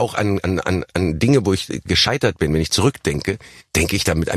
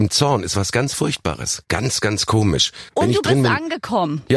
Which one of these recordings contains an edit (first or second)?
second